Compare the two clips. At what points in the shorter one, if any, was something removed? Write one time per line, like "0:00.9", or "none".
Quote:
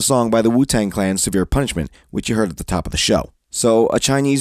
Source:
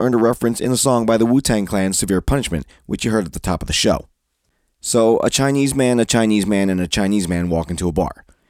0:03.4